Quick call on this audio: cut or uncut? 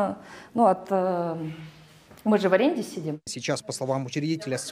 cut